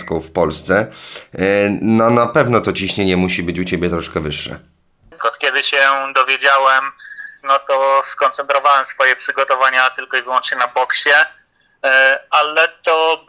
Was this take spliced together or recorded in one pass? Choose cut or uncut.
cut